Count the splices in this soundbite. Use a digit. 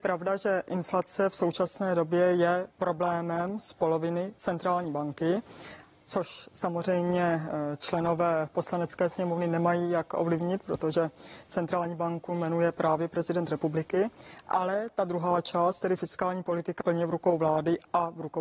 2